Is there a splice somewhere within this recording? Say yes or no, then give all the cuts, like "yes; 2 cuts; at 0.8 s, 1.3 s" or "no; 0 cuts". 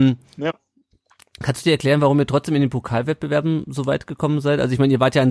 no; 0 cuts